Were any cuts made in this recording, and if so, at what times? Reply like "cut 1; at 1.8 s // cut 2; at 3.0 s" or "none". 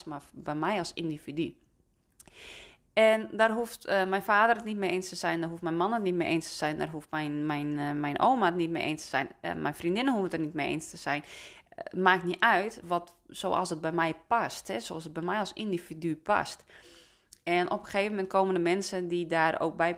cut 1; at 12.8 s